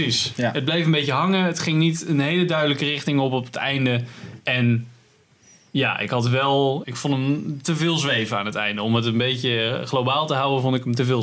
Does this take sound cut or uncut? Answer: cut